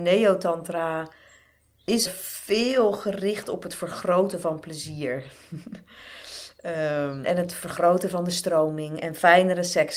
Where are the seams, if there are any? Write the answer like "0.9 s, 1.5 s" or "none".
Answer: 2.1 s, 7.2 s

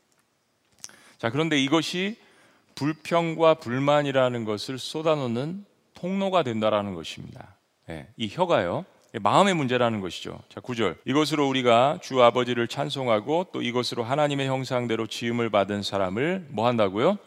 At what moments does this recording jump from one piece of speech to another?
11.0 s

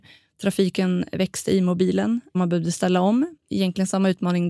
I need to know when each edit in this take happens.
3.4 s

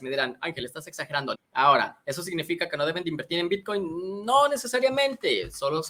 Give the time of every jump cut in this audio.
1.3 s

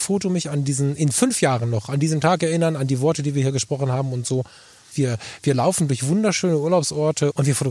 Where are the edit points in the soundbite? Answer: 4.9 s

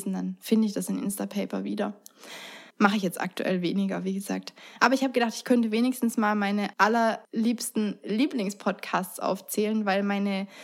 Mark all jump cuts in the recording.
2.7 s, 4.8 s

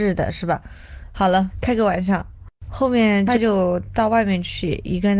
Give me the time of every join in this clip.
1.5 s

